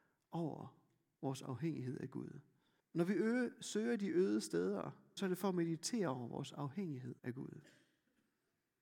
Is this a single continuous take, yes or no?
no